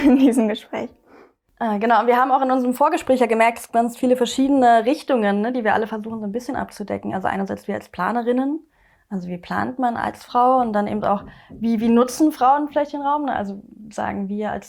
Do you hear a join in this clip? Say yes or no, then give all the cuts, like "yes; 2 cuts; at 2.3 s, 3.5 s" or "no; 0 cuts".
no; 0 cuts